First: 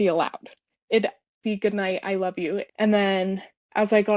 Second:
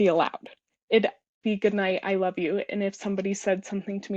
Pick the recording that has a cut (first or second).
first